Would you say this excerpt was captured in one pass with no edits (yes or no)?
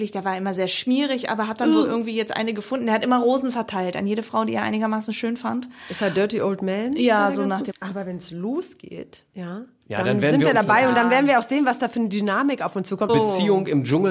no